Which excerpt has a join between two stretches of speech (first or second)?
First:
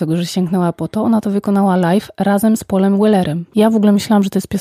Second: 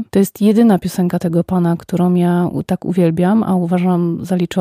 first